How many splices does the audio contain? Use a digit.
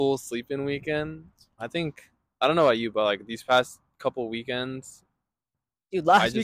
1